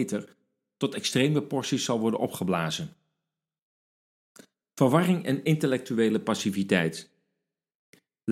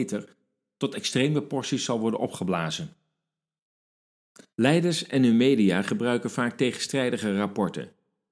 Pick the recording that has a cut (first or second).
second